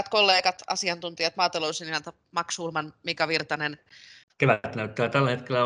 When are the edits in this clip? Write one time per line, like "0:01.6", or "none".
0:04.2